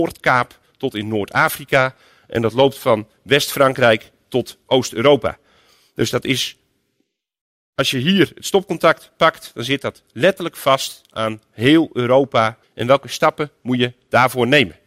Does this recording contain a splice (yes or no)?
yes